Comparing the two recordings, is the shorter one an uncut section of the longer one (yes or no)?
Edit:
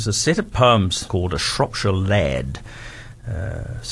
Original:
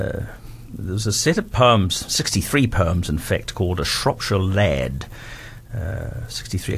no